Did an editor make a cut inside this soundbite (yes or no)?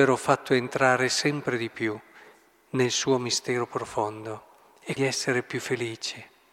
yes